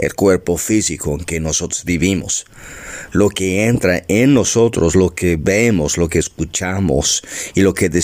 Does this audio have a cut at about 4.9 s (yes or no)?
no